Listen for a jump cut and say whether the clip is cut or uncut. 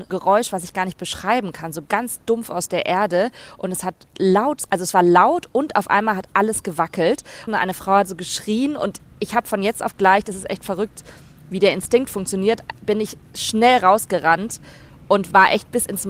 cut